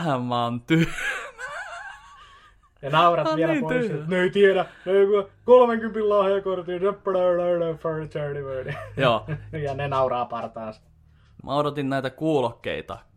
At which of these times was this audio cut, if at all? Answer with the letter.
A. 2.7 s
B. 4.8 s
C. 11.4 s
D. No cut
C